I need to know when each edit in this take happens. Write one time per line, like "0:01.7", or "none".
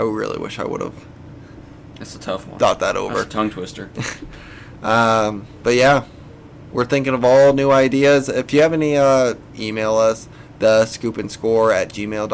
0:09.5